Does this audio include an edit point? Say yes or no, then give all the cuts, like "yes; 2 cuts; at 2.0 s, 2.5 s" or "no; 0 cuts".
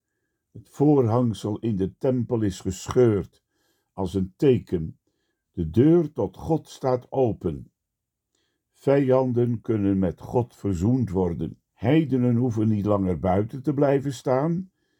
yes; 2 cuts; at 5.4 s, 11.7 s